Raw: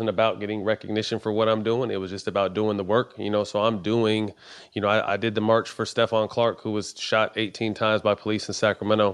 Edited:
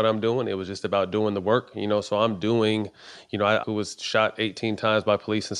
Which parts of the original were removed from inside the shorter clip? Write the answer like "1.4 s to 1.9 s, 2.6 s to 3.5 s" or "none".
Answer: 5.1 s to 6.6 s